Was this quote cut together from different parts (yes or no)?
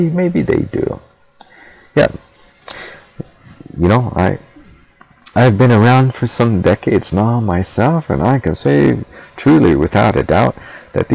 no